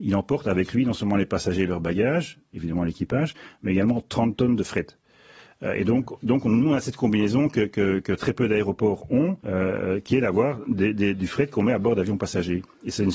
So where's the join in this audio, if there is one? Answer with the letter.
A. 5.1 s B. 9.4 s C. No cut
B